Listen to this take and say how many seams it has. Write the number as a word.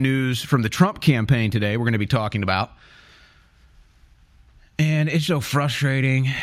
one